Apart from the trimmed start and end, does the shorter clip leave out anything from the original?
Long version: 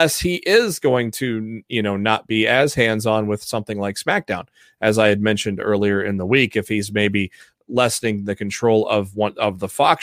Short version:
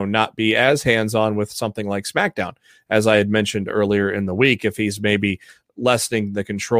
no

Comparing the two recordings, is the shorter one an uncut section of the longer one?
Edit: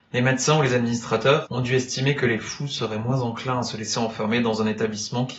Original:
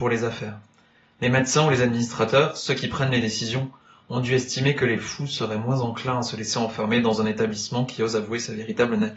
no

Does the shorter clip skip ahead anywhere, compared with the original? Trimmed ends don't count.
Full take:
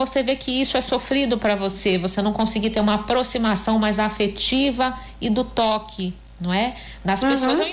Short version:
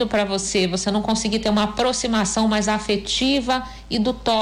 no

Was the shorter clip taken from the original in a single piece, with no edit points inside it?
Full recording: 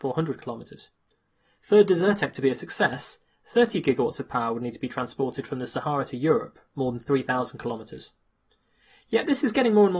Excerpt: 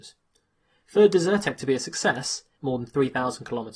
no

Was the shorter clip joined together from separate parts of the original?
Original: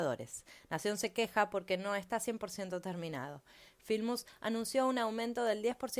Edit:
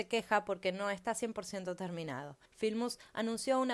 yes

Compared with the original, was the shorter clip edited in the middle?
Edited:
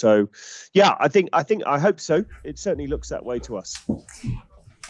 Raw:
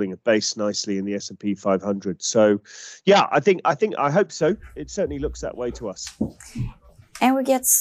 no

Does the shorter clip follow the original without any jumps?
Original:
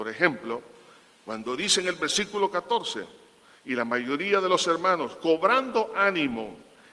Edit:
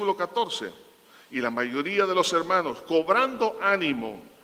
yes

